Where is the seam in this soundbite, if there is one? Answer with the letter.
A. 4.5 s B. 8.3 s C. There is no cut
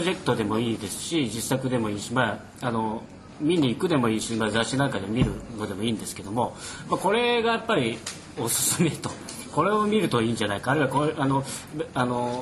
B